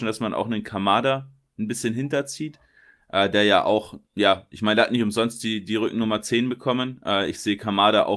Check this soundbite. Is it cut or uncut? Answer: cut